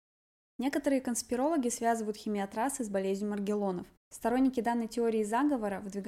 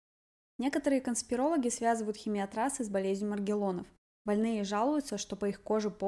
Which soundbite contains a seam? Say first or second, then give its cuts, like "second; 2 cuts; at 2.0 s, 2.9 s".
first; 1 cut; at 4.0 s